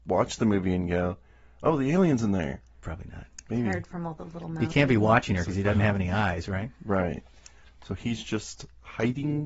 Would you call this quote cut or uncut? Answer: cut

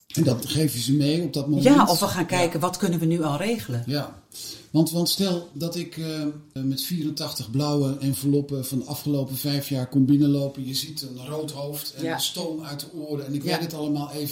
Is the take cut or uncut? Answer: cut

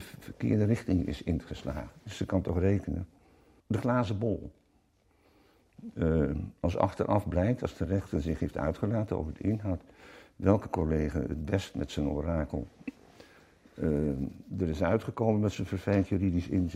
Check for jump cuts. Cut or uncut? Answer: cut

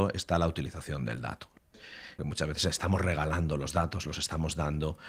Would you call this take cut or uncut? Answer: cut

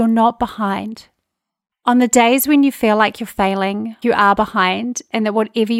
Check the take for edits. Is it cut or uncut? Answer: cut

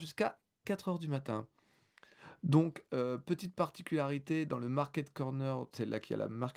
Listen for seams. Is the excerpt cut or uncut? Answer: uncut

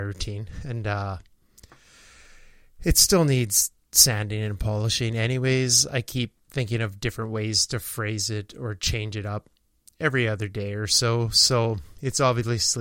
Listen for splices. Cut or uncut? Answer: uncut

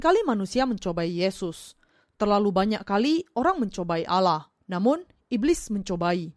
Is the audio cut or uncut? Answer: cut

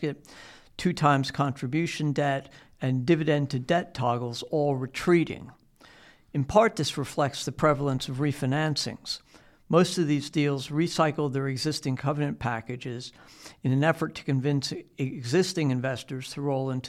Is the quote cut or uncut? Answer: uncut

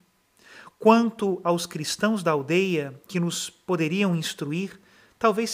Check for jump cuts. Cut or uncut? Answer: uncut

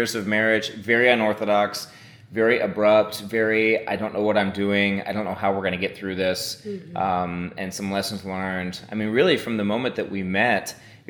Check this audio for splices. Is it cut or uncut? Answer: uncut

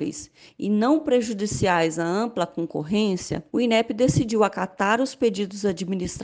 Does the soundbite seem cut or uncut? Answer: cut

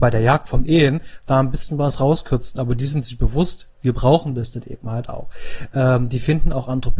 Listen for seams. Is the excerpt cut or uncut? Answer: uncut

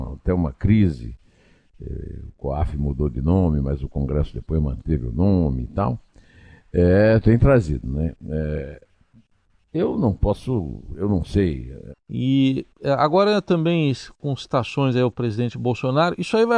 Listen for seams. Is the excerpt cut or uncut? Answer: cut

